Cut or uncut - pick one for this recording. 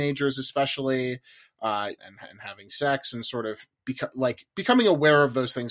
cut